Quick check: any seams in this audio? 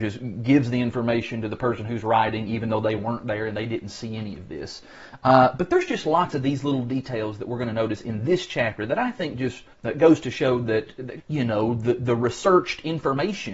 yes; 2 cuts; at 9.7 s, 11.2 s

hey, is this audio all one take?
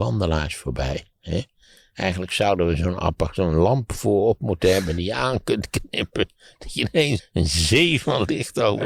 no; 1 cut; at 7.2 s

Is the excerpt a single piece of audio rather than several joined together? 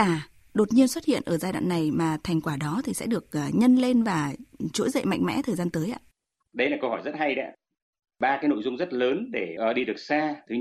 yes; 0 cuts

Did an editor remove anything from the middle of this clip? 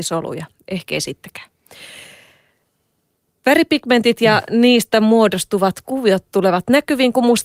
no; 0 cuts

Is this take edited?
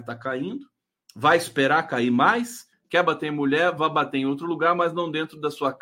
yes; 1 cut; at 2.7 s

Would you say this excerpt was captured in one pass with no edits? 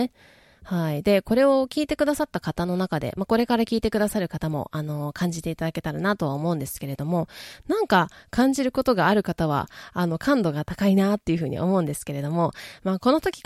yes; 0 cuts

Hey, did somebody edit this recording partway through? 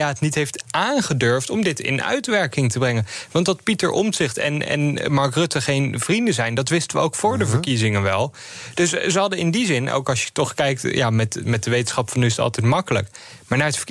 no; 0 cuts

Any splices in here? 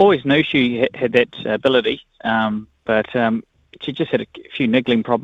no; 0 cuts

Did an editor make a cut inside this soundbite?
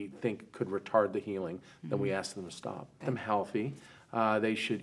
yes; 1 cut; at 3.0 s

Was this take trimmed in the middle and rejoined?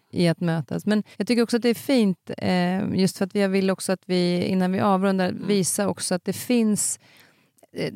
yes; 1 cut; at 1.1 s

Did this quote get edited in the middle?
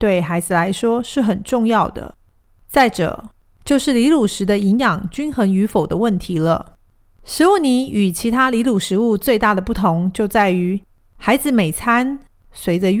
no; 0 cuts

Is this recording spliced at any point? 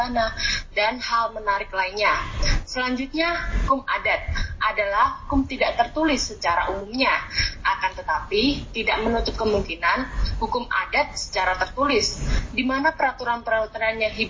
yes; 1 cut; at 3.7 s

